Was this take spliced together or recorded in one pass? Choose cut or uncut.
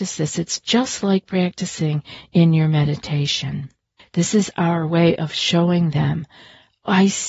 cut